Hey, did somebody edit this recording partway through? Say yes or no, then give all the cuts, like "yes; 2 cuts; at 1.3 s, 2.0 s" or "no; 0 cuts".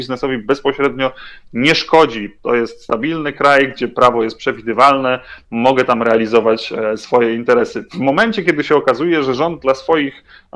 yes; 1 cut; at 5.4 s